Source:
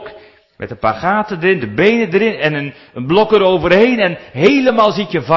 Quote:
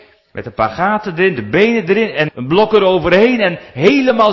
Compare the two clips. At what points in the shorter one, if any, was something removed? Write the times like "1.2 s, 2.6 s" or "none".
2.3 s